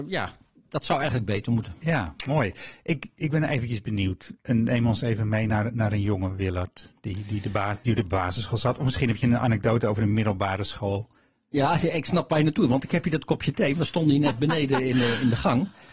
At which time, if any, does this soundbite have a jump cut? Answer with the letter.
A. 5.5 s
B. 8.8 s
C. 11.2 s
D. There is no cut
D